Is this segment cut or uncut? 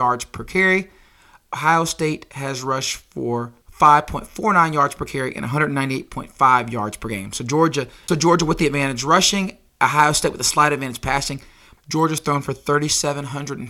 cut